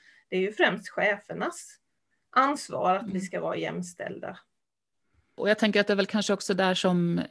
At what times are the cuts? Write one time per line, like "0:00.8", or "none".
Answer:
none